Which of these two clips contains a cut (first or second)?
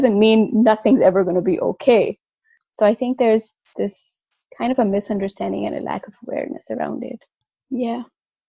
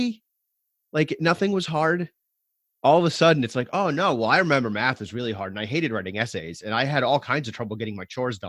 first